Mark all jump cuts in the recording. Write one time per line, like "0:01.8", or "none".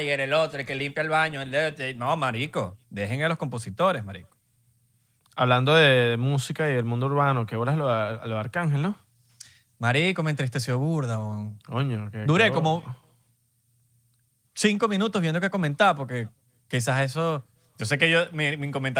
none